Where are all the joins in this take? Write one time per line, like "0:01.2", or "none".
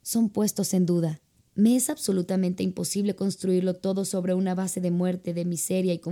0:01.4